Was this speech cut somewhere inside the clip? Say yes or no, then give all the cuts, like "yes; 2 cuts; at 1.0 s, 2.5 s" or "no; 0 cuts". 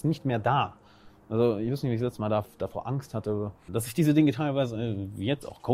yes; 1 cut; at 3.7 s